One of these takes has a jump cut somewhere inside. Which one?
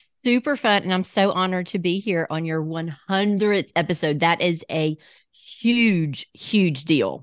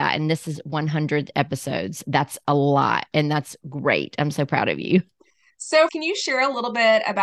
second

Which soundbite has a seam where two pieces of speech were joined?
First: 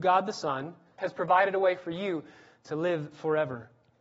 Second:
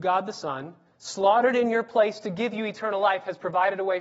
first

